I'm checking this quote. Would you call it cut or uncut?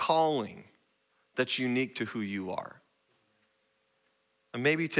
uncut